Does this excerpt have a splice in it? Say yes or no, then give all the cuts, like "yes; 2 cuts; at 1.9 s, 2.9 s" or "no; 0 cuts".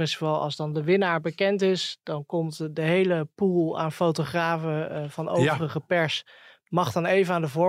no; 0 cuts